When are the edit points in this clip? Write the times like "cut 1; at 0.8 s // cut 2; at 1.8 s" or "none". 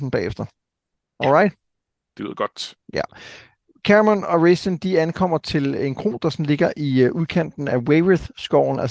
none